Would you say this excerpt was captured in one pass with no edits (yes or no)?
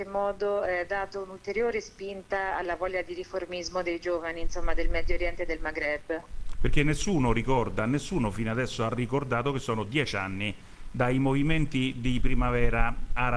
yes